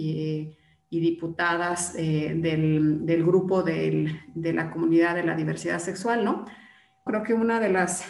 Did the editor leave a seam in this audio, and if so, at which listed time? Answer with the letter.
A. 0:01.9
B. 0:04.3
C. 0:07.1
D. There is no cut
C